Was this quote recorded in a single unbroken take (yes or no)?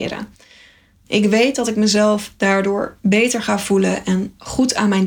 yes